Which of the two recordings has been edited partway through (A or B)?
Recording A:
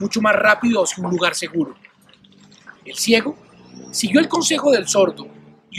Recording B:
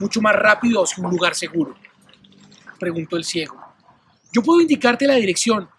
B